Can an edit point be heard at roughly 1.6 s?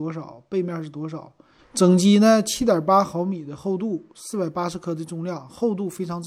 yes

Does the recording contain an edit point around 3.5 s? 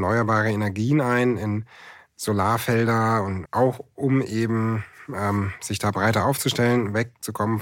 yes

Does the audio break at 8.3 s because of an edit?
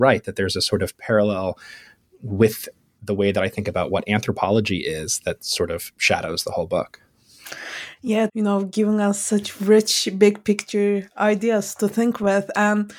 yes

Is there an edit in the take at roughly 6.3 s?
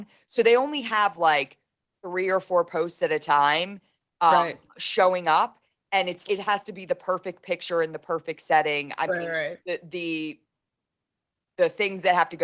yes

